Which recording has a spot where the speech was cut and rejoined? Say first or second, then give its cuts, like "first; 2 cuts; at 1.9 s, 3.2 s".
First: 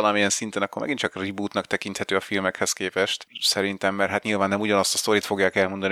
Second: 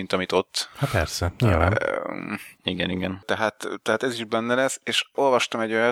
second; 1 cut; at 2.6 s